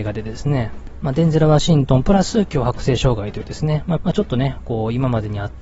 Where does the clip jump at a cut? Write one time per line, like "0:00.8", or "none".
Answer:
0:04.0